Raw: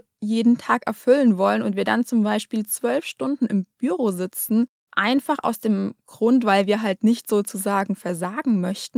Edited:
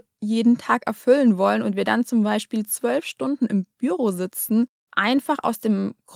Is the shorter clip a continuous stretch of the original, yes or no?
yes